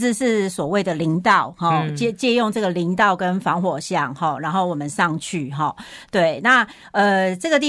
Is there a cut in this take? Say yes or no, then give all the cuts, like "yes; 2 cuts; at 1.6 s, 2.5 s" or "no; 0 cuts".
no; 0 cuts